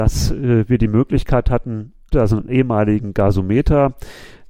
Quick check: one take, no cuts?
no; 1 cut; at 2.1 s

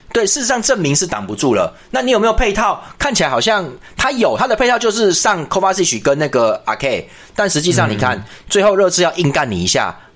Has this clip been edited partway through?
no; 0 cuts

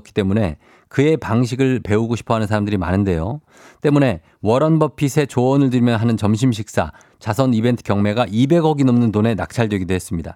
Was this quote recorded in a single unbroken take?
yes; 0 cuts

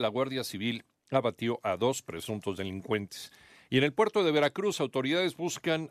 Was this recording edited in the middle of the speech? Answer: no; 0 cuts

